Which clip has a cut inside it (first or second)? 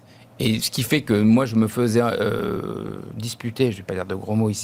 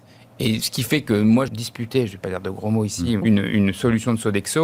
second